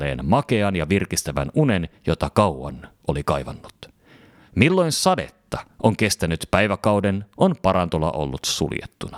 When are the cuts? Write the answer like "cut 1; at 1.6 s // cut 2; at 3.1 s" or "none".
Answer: none

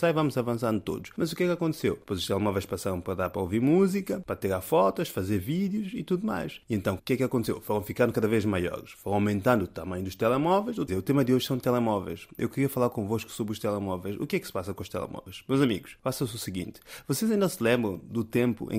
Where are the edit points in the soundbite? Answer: cut 1; at 7.0 s // cut 2; at 10.9 s

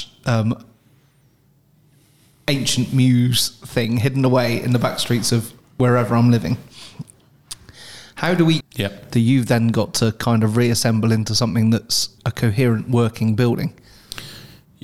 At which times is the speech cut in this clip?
cut 1; at 8.6 s // cut 2; at 12.2 s

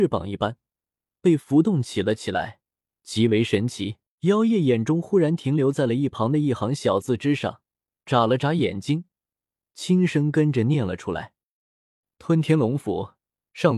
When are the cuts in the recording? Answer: cut 1; at 4.2 s

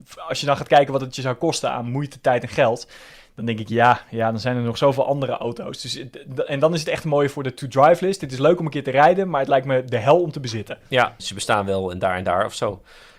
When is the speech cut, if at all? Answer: cut 1; at 11.2 s

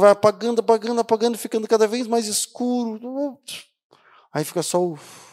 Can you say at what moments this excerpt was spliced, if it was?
none

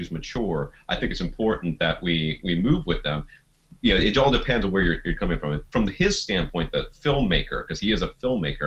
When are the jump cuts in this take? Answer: none

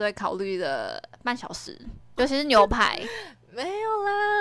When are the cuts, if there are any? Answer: cut 1; at 2.2 s

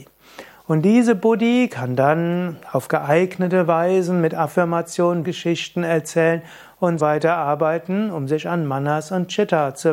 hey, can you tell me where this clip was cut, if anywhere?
cut 1; at 5.2 s // cut 2; at 7.0 s

